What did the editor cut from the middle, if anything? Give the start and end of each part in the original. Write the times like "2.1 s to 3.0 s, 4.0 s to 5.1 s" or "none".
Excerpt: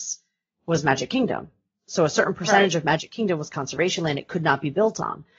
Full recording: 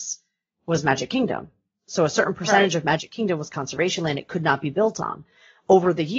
none